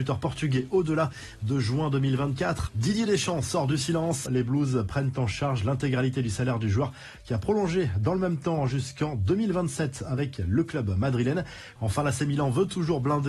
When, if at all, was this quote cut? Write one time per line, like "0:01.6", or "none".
0:02.7
0:04.3
0:11.8